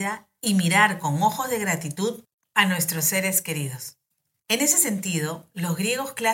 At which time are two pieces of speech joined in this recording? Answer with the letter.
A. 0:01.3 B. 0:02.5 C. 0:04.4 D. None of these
C